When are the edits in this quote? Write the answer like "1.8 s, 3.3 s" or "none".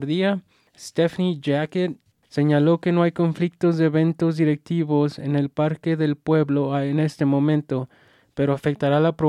2.1 s